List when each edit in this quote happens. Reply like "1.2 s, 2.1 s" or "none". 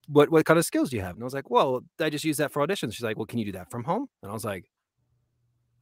1.1 s